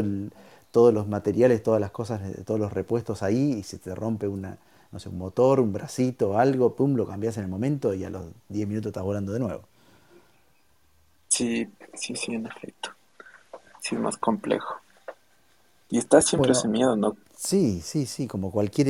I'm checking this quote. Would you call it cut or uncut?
cut